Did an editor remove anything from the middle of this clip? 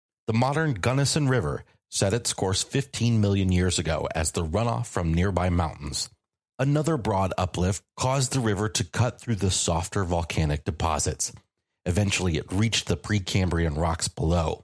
yes; 1 cut; at 7.9 s

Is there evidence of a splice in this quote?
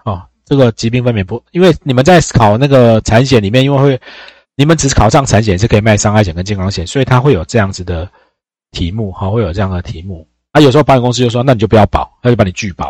yes; 1 cut; at 10.5 s

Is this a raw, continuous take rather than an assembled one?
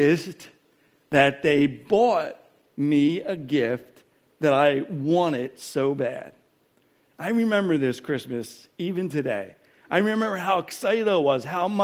yes; 0 cuts

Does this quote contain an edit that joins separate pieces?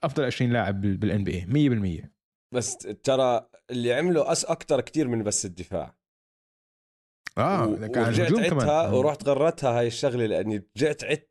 no; 0 cuts

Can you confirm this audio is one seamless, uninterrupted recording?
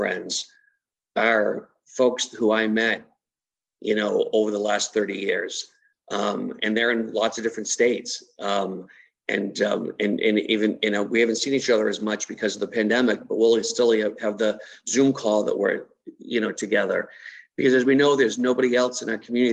yes; 0 cuts

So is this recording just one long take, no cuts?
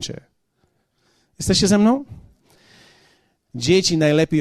no; 1 cut; at 3.5 s

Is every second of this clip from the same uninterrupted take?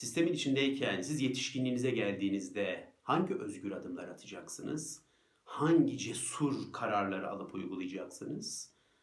yes; 0 cuts

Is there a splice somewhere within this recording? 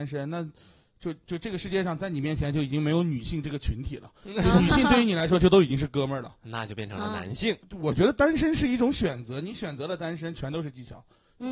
yes; 1 cut; at 7.6 s

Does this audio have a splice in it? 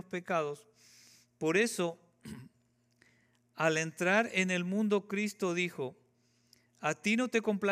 no; 0 cuts

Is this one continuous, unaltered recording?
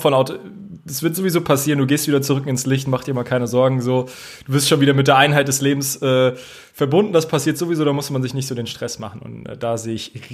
yes; 0 cuts

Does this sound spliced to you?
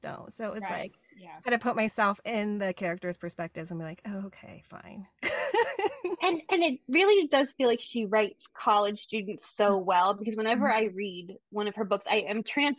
no; 0 cuts

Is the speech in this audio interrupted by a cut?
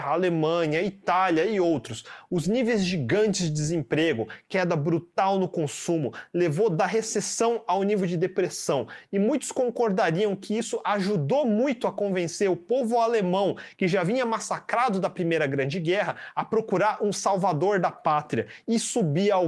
no; 0 cuts

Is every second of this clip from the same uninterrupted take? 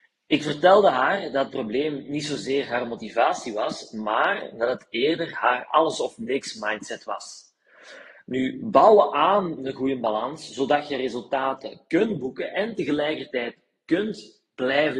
yes; 0 cuts

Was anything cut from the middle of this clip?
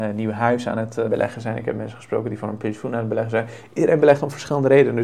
yes; 1 cut; at 1.0 s

